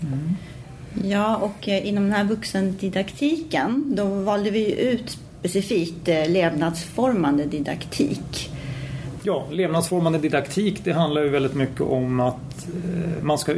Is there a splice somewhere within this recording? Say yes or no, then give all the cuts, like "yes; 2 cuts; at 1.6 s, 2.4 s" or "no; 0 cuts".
yes; 1 cut; at 9.2 s